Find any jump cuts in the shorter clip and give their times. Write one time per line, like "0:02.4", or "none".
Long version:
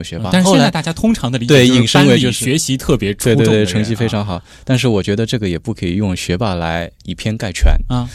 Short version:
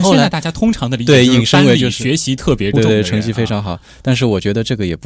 0:02.7